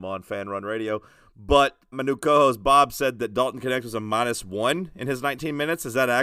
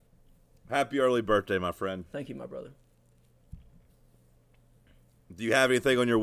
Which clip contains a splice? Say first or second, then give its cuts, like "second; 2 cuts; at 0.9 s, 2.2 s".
first; 1 cut; at 1.9 s